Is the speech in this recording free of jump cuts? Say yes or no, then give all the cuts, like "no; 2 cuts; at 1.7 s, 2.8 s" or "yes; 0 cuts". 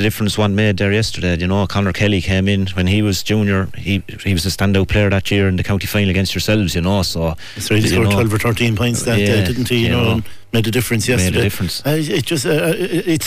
yes; 0 cuts